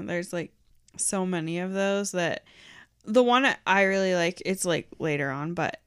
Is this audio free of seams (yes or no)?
yes